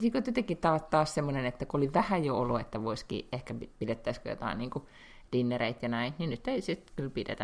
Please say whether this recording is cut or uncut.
uncut